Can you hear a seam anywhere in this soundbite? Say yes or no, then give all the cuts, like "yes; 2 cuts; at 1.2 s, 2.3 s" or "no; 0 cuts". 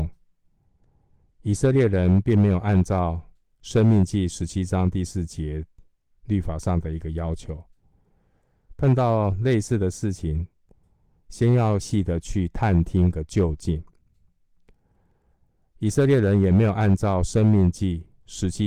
yes; 1 cut; at 11.8 s